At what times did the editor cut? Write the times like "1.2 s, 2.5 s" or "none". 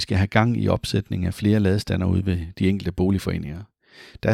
none

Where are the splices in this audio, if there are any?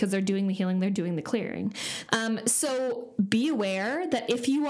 2.1 s

